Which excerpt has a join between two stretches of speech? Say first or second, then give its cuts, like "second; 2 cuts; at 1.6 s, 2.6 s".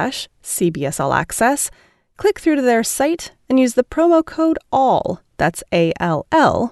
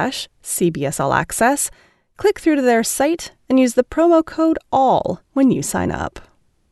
second; 1 cut; at 5.3 s